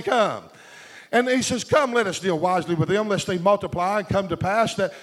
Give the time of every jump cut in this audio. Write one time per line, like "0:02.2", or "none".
none